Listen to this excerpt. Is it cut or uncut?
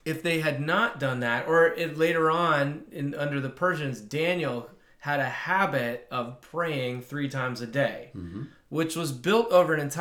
uncut